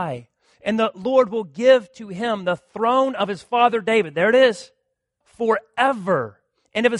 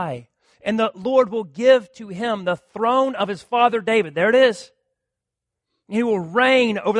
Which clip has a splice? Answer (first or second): first